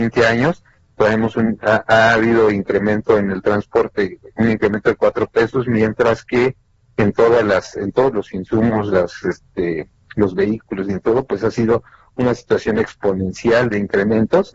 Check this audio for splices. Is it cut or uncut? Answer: uncut